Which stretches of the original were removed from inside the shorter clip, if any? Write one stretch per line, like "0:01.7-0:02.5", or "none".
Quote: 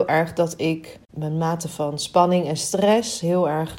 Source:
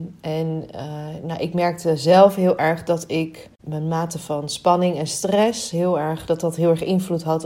none